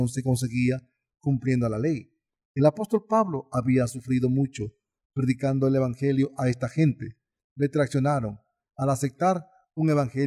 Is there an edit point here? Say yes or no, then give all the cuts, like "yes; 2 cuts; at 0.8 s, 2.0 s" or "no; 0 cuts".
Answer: yes; 1 cut; at 7.4 s